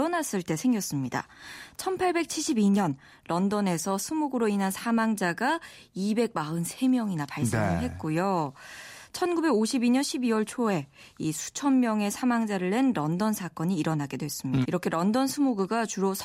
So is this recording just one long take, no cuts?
no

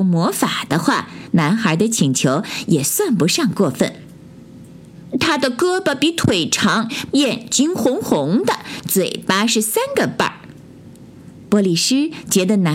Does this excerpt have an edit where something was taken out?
yes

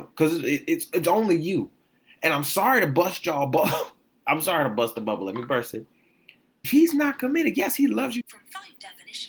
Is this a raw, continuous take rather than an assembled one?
no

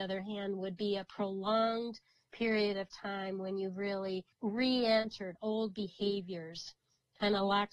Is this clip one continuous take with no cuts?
no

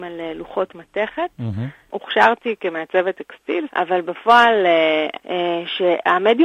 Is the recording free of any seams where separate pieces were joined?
no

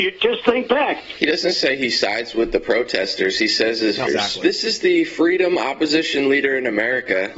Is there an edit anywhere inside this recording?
yes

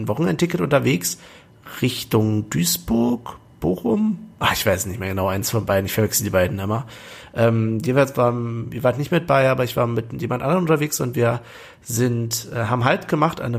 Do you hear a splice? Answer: no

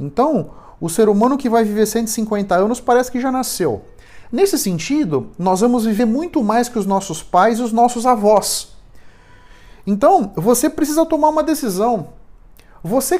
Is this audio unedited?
yes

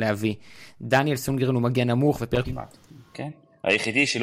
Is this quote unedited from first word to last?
no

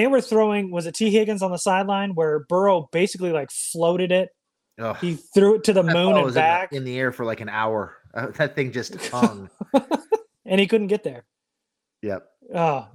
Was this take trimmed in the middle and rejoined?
no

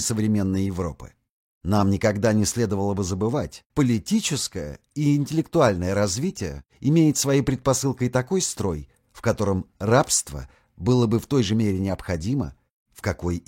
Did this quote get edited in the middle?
yes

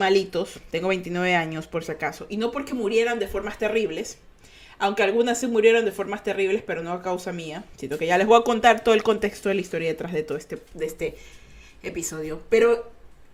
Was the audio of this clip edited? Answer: no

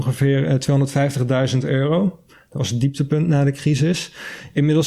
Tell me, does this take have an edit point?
no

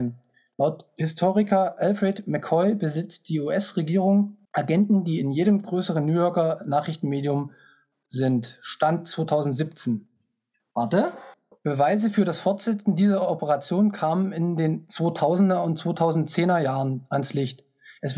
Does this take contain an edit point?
yes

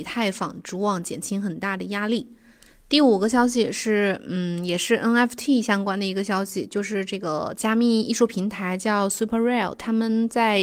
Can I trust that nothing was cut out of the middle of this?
no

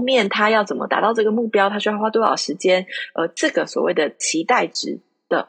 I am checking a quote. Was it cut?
no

